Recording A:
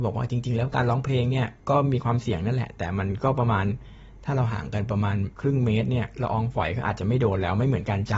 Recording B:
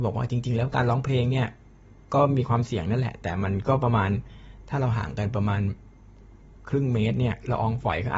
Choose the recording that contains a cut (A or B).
A